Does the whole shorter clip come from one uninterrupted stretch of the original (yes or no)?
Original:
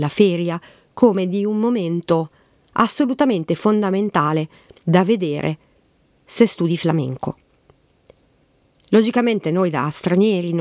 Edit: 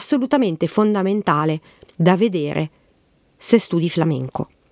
yes